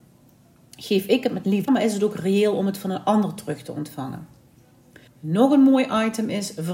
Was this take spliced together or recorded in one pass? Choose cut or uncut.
cut